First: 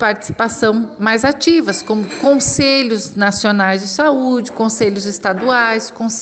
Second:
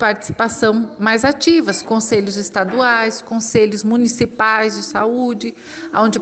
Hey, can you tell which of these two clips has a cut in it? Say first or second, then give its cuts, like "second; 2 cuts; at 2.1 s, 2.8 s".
second; 1 cut; at 1.8 s